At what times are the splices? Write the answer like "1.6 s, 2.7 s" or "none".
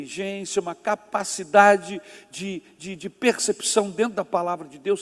none